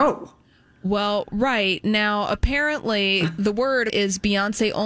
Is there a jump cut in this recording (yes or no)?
yes